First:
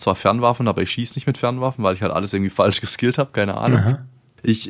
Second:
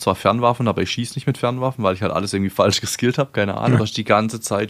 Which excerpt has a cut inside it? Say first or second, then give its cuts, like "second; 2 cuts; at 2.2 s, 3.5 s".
second; 1 cut; at 3.8 s